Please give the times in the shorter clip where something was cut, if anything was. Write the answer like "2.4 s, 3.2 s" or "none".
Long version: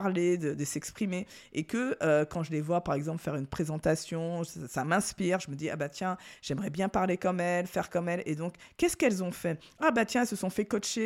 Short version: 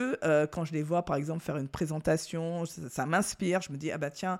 none